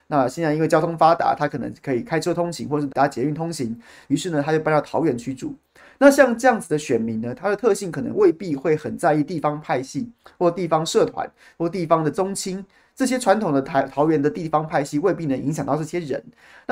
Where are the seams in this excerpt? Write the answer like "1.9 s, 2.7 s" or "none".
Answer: 2.9 s